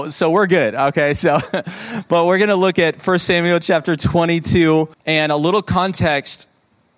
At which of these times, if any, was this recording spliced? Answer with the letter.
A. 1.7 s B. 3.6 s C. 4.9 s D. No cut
C